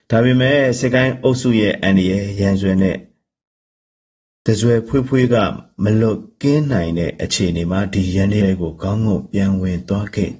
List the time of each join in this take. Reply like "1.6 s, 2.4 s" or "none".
8.4 s